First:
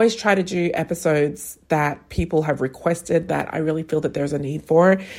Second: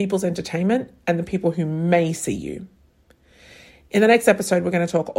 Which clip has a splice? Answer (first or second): first